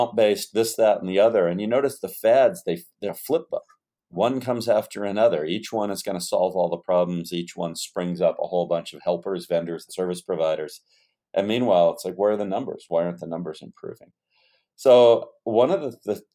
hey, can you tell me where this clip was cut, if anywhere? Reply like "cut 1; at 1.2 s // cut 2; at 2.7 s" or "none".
cut 1; at 3.1 s // cut 2; at 9.9 s